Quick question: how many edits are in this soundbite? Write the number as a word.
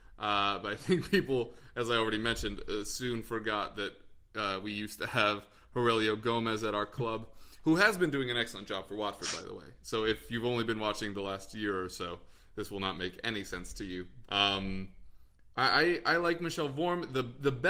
one